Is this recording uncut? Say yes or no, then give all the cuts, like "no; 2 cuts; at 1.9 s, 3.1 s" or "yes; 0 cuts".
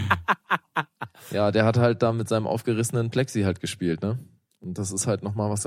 yes; 0 cuts